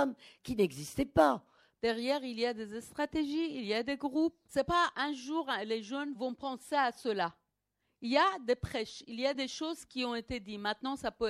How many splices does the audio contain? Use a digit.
1